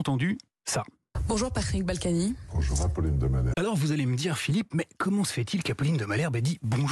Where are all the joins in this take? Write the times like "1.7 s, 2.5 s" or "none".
3.5 s